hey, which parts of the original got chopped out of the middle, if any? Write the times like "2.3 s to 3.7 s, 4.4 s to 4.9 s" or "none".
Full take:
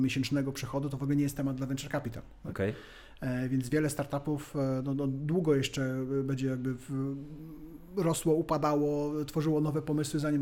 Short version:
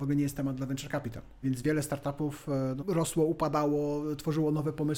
2.4 s to 3.5 s, 4.9 s to 7.9 s